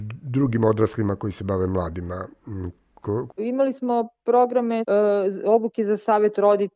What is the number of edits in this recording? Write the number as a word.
one